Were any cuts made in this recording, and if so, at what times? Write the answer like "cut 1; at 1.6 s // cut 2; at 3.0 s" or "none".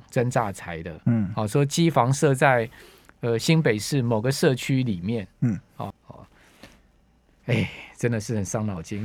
cut 1; at 5.9 s